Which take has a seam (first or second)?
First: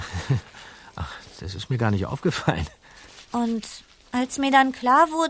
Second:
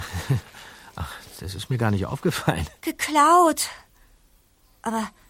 second